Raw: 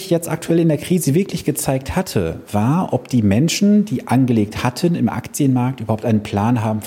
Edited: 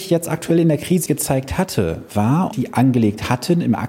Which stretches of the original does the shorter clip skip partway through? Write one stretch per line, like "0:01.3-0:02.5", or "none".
0:01.1-0:01.4
0:02.9-0:03.9